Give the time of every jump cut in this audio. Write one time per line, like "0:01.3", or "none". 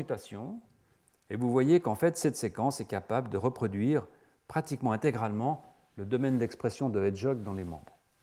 none